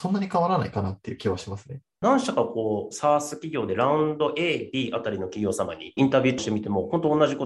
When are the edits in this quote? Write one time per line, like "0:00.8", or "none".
none